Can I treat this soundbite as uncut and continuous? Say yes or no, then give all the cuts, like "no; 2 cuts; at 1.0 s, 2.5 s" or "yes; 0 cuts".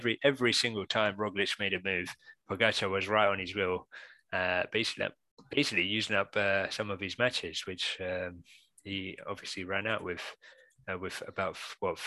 yes; 0 cuts